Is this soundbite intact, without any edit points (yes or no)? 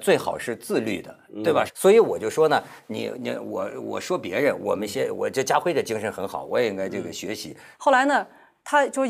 no